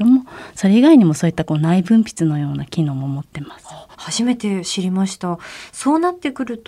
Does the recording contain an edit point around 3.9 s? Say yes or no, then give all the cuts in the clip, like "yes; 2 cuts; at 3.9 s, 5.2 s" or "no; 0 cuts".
yes; 1 cut; at 3.9 s